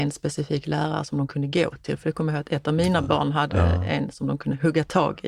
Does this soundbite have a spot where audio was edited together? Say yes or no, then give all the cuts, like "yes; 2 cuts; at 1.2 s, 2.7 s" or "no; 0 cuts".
no; 0 cuts